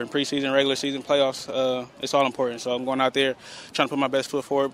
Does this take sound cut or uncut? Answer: uncut